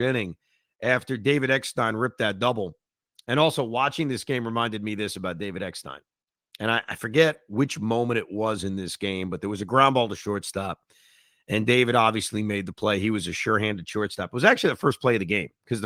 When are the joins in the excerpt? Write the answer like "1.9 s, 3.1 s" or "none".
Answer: none